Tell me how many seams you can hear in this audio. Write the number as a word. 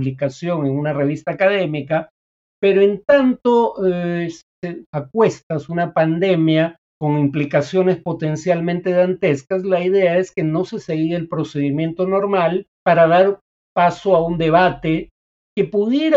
three